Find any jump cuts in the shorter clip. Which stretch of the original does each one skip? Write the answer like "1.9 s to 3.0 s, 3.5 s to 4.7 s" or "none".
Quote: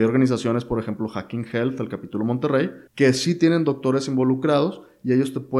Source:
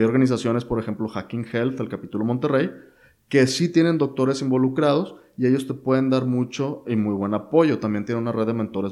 2.9 s to 3.2 s